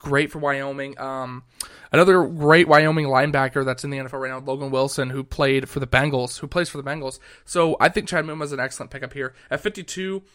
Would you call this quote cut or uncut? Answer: uncut